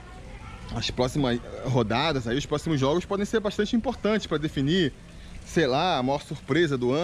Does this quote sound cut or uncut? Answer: uncut